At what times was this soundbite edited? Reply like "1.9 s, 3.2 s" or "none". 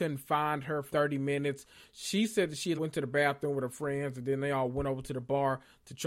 0.9 s, 2.8 s